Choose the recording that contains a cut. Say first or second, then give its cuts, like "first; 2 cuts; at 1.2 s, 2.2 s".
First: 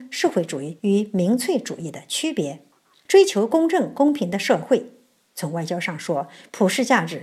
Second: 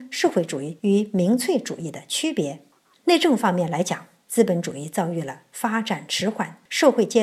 second; 1 cut; at 3.0 s